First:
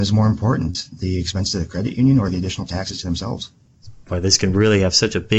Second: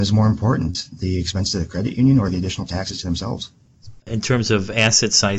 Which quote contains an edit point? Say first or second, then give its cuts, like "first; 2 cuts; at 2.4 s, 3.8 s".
second; 1 cut; at 4.0 s